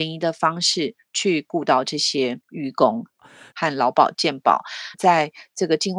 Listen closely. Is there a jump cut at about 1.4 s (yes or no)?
no